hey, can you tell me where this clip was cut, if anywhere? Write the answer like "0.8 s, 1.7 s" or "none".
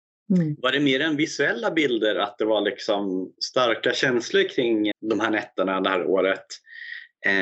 4.9 s